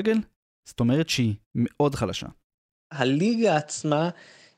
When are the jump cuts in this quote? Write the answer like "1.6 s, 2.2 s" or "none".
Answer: 2.8 s